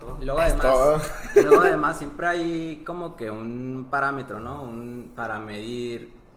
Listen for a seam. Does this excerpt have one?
no; 0 cuts

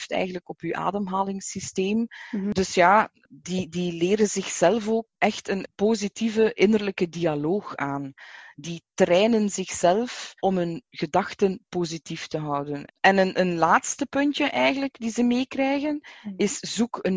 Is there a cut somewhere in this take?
yes; 2 cuts; at 10.4 s, 12.9 s

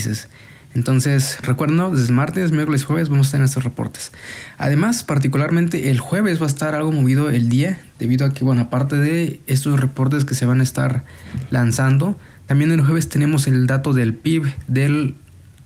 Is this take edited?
yes; 1 cut; at 1.4 s

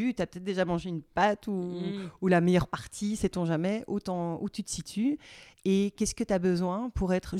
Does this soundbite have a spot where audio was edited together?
no; 0 cuts

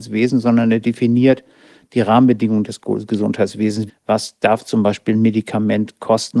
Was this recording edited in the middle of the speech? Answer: yes; 1 cut; at 3.9 s

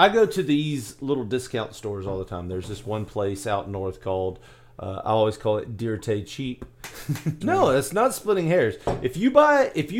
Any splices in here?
yes; 1 cut; at 7.4 s

